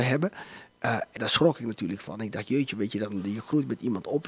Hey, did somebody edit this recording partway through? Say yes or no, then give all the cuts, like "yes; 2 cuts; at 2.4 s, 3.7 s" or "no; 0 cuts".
yes; 1 cut; at 1.2 s